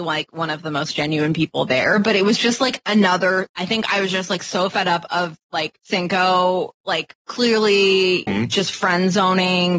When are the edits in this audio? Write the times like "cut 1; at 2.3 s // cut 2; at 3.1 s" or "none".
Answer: cut 1; at 5.8 s // cut 2; at 8.3 s